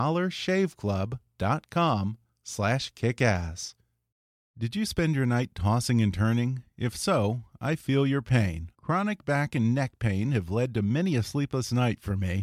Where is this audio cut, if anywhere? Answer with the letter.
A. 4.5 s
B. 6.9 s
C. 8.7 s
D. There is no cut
C